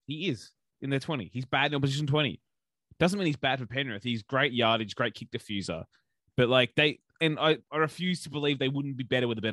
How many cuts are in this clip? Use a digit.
0